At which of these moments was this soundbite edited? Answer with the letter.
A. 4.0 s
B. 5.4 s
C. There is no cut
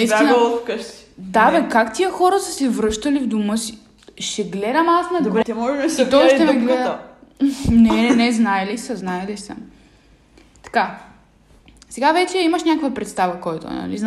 B